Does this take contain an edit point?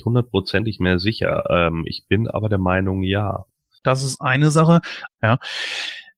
yes; 2 cuts; at 3.8 s, 5.1 s

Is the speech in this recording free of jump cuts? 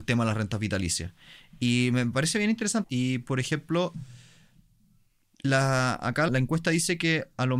no; 2 cuts; at 2.8 s, 6.3 s

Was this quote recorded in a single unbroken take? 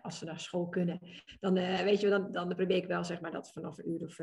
yes; 0 cuts

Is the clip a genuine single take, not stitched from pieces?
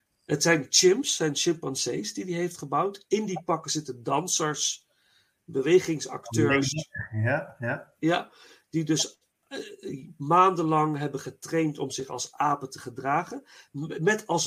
yes; 0 cuts

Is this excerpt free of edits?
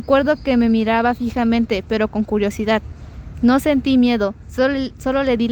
yes; 0 cuts

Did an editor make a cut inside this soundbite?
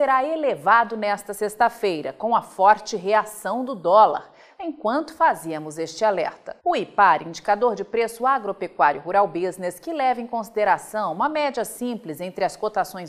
yes; 2 cuts; at 4.6 s, 6.6 s

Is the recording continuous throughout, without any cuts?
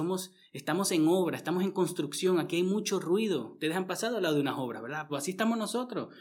no; 1 cut; at 5.1 s

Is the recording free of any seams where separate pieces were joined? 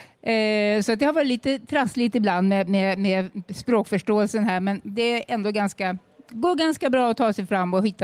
yes; 0 cuts

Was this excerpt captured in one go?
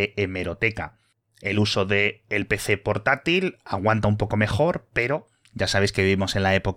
yes; 0 cuts

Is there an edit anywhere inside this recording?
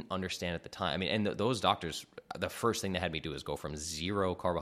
no; 0 cuts

